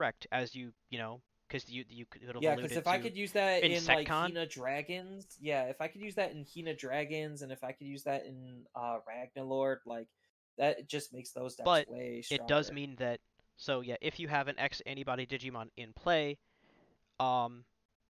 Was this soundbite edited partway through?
no; 0 cuts

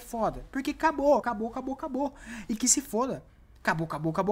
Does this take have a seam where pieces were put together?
yes; 1 cut; at 1.2 s

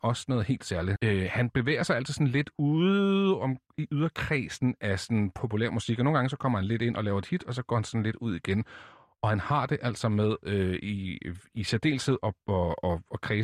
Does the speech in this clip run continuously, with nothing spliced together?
no; 1 cut; at 1.0 s

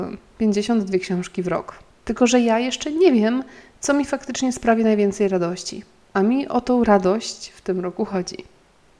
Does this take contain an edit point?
yes; 1 cut; at 1.9 s

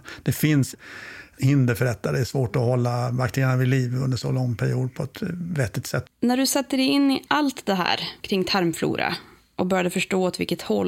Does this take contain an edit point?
yes; 1 cut; at 6.1 s

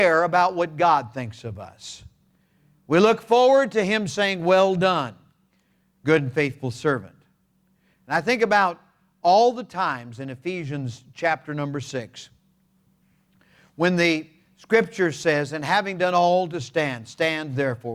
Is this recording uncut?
yes; 0 cuts

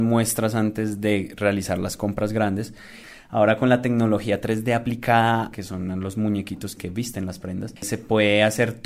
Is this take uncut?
no; 1 cut; at 5.5 s

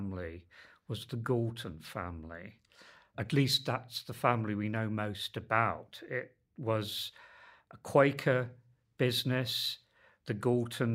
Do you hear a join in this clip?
no; 0 cuts

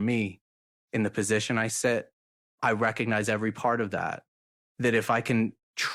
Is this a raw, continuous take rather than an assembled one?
yes; 0 cuts

